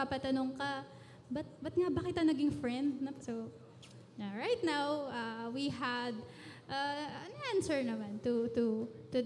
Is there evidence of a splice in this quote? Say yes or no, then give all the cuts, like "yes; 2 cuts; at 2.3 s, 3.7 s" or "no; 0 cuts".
yes; 1 cut; at 3.2 s